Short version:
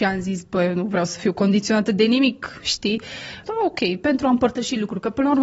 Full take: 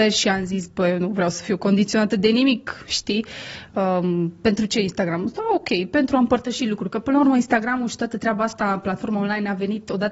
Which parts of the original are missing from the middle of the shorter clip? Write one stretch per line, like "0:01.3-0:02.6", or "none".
0:03.7-0:05.3